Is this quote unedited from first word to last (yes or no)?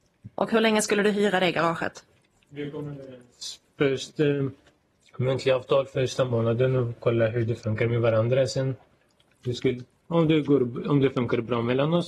yes